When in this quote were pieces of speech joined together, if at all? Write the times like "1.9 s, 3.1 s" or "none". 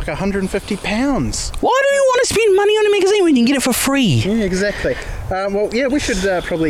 none